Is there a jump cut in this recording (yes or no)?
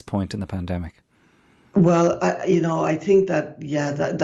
no